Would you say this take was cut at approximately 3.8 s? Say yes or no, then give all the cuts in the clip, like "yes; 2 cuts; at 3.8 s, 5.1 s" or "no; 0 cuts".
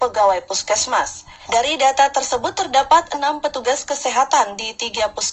no; 1 cut; at 1.5 s